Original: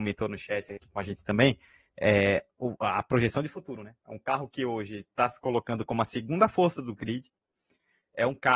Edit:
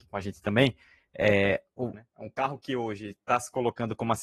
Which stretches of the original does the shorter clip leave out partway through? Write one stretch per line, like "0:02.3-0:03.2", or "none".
0:02.8-0:03.8